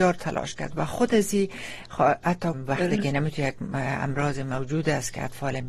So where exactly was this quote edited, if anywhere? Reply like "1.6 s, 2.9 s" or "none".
2.5 s